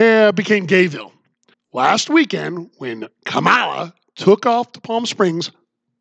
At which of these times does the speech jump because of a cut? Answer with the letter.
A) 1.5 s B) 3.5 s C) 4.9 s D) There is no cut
A